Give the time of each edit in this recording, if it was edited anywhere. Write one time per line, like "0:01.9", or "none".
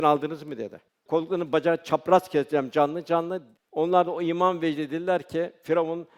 0:01.0
0:03.7